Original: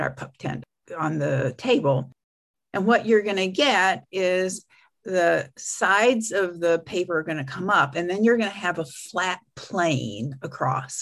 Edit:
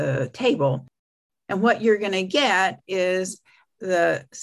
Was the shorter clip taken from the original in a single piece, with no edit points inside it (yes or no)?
yes